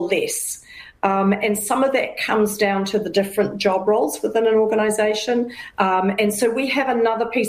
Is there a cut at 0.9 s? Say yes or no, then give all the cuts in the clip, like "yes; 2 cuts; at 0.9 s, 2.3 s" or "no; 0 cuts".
no; 1 cut; at 5.7 s